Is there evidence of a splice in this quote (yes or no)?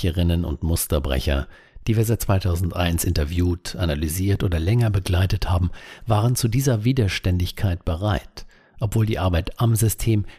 no